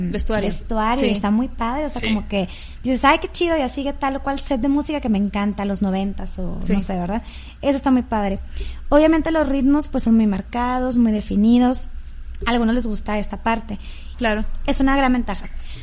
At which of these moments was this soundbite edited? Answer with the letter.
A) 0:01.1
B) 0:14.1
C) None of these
B